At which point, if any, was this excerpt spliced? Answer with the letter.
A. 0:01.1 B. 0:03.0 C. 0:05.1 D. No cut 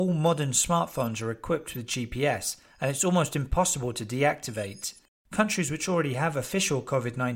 C